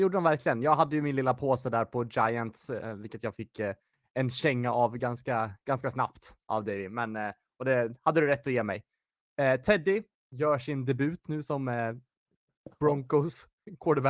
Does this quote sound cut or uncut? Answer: uncut